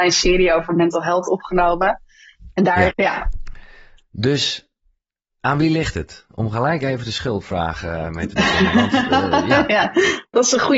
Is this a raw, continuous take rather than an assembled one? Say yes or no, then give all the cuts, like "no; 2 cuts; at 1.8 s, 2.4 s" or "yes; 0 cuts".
no; 1 cut; at 2.9 s